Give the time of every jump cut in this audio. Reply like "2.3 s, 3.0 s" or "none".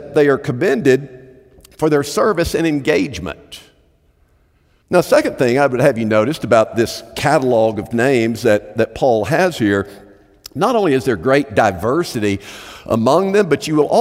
4.8 s